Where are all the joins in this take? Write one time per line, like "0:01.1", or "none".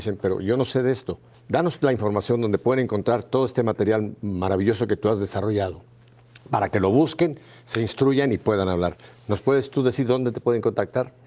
0:01.3